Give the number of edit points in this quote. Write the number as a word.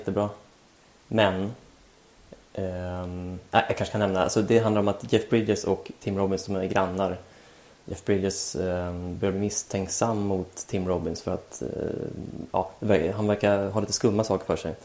zero